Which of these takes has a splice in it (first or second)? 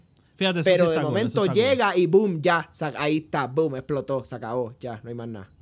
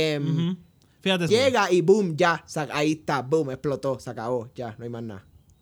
second